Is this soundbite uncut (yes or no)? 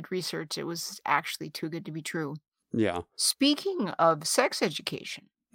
yes